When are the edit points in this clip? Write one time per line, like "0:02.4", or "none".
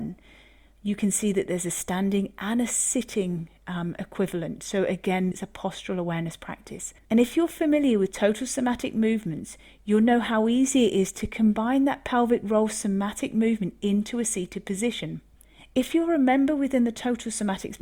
0:05.3
0:07.0